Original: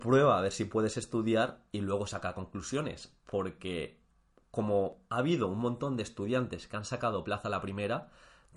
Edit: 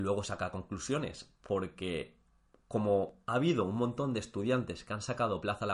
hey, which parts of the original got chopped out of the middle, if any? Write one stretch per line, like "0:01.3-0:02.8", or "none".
none